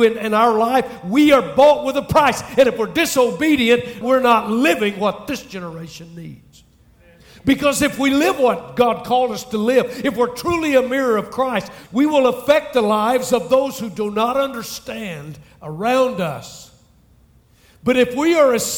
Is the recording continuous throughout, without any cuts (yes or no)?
no